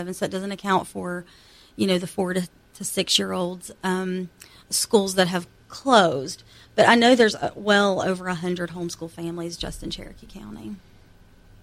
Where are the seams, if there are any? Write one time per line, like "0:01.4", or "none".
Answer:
0:04.6